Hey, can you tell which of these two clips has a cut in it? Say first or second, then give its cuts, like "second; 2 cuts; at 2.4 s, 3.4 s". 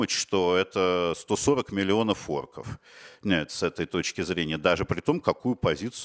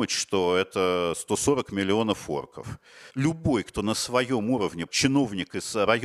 second; 2 cuts; at 3.1 s, 4.9 s